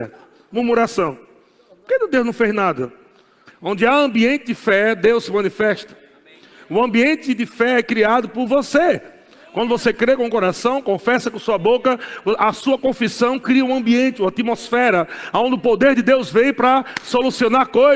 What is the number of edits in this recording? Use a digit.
1